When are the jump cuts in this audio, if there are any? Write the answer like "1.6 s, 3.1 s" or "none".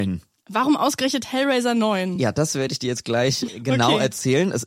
none